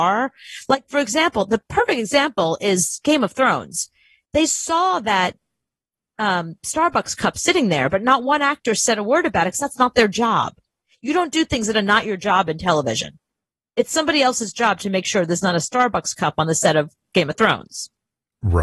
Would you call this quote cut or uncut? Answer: uncut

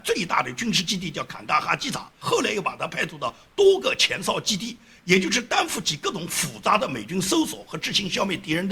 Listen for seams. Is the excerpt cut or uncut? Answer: uncut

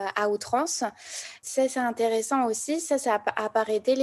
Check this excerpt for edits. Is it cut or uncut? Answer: uncut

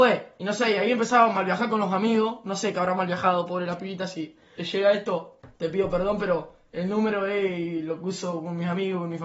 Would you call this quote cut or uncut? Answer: cut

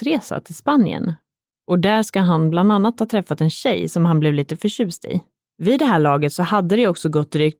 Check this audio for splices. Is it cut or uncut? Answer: cut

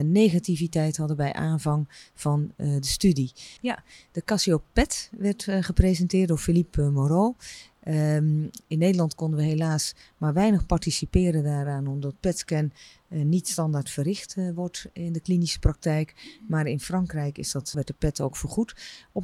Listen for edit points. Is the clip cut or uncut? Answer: cut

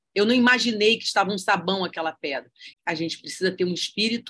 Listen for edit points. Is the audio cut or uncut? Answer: cut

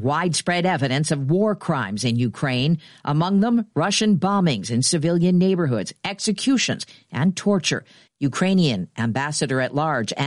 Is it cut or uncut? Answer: uncut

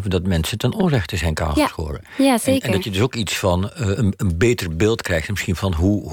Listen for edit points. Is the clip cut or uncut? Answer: uncut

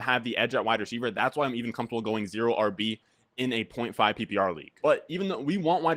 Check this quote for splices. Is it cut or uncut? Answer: uncut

